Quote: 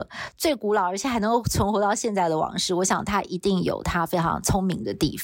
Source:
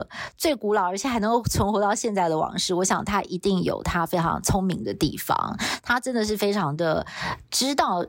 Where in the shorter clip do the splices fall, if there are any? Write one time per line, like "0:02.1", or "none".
none